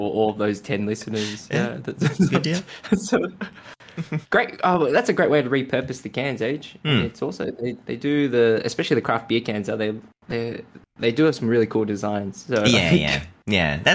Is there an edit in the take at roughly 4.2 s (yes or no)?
yes